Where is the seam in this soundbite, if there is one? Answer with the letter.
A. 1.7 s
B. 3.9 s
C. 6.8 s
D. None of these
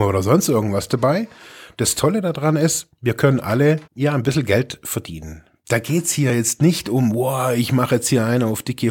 B